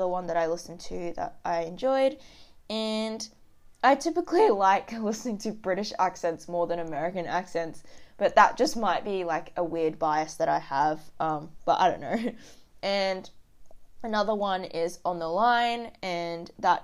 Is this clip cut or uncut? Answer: uncut